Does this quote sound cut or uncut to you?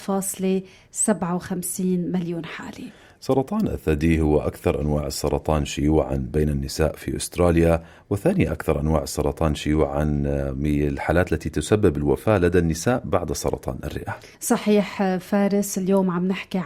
cut